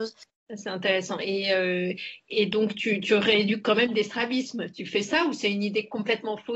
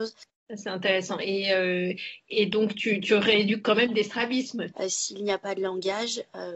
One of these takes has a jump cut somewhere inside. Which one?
second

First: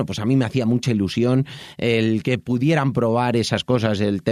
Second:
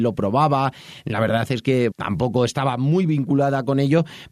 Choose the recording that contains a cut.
second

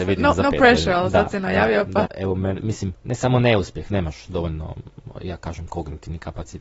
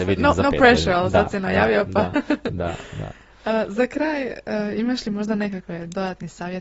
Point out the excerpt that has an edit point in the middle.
first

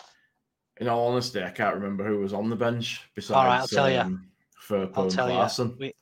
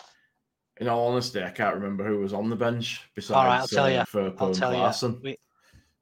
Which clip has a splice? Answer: second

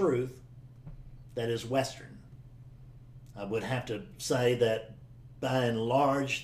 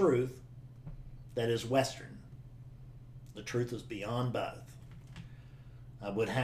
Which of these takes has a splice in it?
first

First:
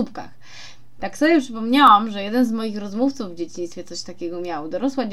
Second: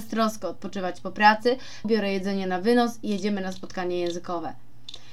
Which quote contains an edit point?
second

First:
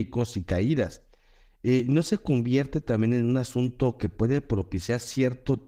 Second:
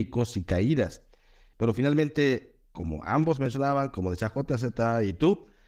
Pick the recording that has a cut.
second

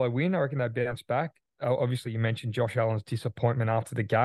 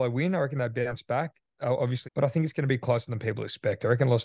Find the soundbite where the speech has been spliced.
second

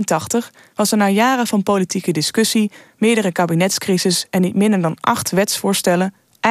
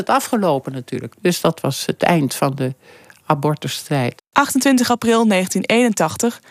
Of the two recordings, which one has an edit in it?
second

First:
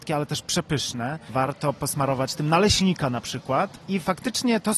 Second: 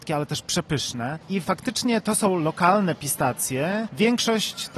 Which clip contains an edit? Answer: second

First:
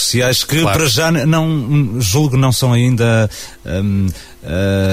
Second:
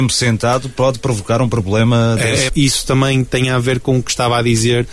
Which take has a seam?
second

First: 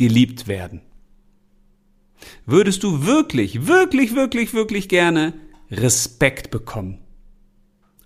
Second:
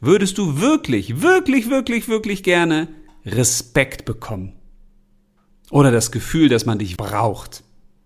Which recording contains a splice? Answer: second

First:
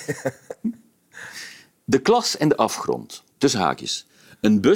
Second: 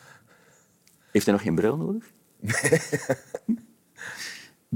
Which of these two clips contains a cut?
first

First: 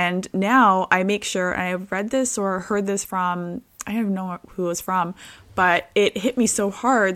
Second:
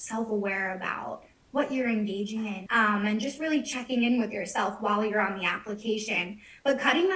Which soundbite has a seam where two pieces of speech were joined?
second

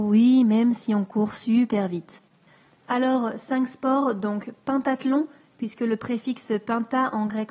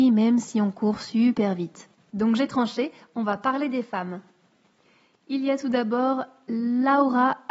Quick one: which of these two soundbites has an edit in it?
second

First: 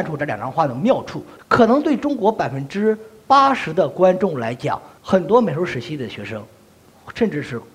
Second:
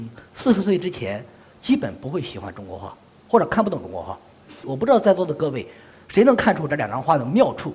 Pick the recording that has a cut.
first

